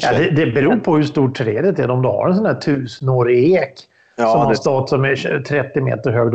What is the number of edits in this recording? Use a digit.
0